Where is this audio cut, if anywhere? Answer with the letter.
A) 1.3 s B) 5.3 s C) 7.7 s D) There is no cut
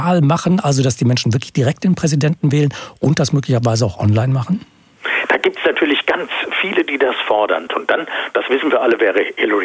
C